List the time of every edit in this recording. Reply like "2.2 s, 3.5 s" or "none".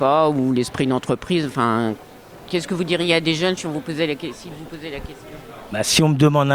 none